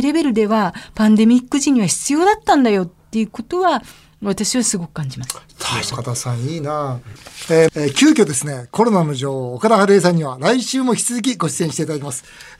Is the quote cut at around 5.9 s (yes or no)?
yes